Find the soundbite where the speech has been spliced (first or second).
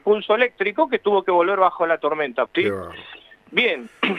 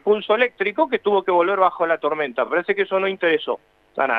first